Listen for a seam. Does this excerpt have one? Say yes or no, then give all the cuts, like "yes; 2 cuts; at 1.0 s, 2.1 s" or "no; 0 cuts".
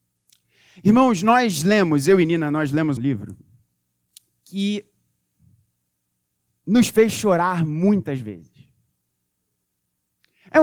yes; 1 cut; at 3.0 s